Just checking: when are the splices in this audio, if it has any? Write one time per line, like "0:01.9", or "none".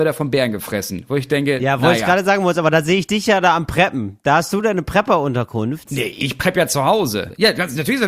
0:05.9

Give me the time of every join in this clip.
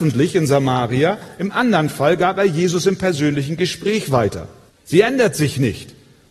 0:04.7

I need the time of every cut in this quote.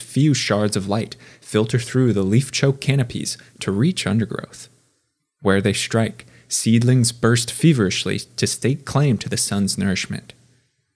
none

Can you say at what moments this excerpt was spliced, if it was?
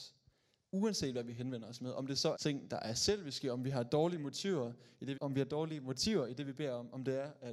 0:02.3
0:05.1

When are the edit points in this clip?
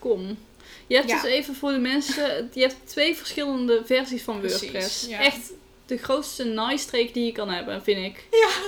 none

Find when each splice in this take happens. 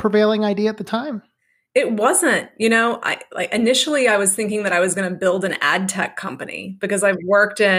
none

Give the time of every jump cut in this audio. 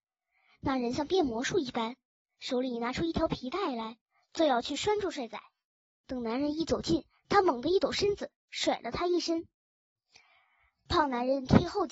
0:05.9
0:08.4

